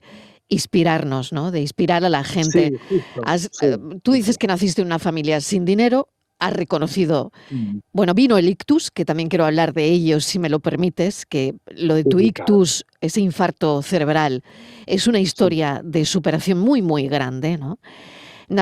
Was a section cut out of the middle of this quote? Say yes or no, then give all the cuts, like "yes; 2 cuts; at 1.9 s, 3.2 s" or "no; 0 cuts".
yes; 1 cut; at 7.8 s